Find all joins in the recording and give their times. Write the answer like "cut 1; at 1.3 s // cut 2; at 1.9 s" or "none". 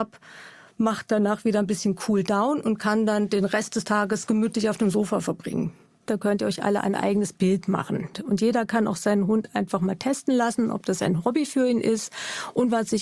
cut 1; at 6.1 s // cut 2; at 8.1 s